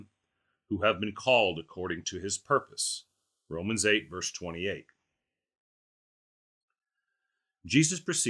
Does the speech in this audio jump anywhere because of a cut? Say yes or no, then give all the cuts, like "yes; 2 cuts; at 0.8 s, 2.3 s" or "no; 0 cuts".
no; 0 cuts